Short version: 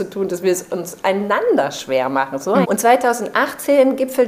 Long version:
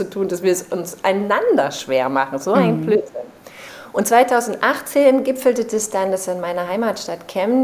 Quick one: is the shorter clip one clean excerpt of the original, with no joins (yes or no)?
no